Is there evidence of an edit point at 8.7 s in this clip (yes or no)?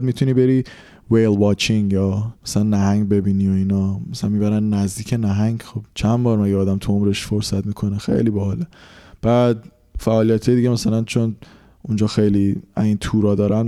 no